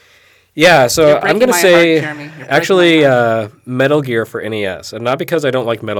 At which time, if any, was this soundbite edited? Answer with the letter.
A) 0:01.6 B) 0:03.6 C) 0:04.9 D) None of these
D